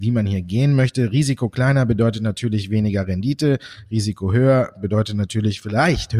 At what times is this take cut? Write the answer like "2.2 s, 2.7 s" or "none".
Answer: none

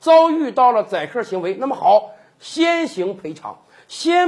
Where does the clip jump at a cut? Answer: none

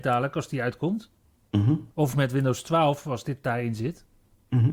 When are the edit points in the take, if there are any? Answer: 1.9 s

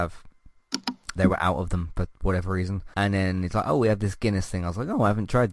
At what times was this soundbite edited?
1.2 s, 2.9 s

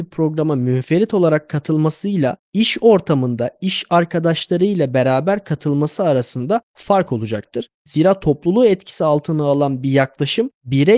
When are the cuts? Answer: none

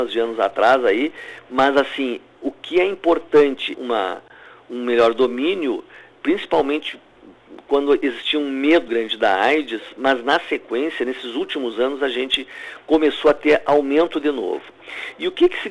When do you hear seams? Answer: 3.7 s, 8.9 s

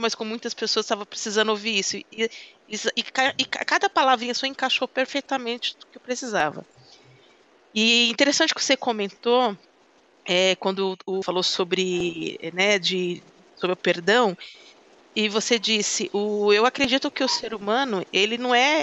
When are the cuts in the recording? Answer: 11.2 s

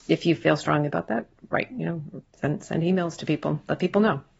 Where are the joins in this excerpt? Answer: 2.3 s

